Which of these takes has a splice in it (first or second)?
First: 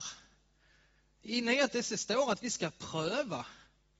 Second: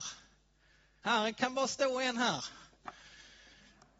second